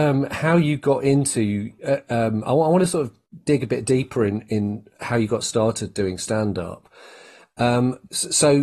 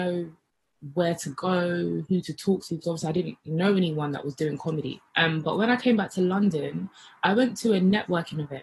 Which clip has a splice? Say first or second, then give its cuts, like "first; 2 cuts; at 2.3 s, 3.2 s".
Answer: second; 1 cut; at 5.1 s